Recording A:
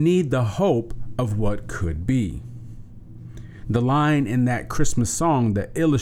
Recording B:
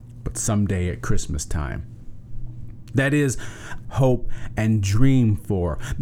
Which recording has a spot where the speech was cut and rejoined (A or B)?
B